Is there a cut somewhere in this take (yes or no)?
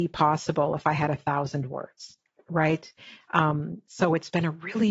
no